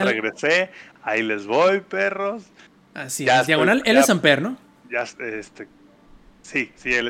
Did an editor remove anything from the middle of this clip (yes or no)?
no